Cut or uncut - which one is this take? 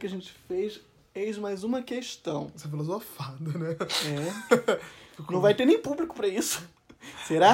cut